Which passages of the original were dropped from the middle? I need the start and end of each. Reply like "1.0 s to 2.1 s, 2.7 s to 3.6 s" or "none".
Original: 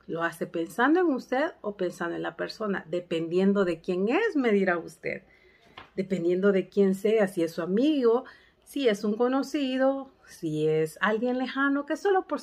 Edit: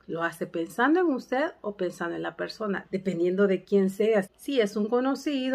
2.8 s to 5.9 s, 7.3 s to 8.5 s